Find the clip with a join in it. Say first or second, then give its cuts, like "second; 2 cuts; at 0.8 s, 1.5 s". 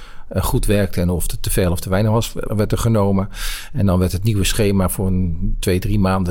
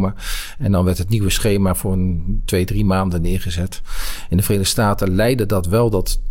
first; 1 cut; at 2.5 s